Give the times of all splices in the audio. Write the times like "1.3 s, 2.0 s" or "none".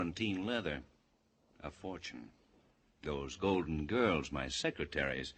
none